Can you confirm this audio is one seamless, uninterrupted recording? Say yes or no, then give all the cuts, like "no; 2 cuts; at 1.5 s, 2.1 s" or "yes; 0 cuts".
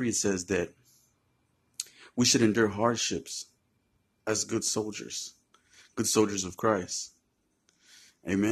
yes; 0 cuts